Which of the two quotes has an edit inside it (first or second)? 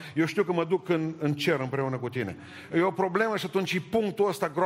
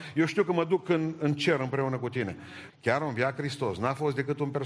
second